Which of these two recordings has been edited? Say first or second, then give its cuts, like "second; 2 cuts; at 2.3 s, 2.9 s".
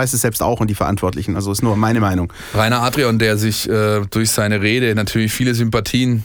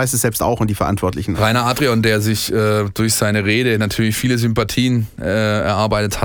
second; 1 cut; at 1.3 s